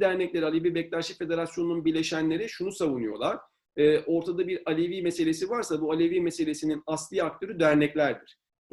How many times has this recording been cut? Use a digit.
0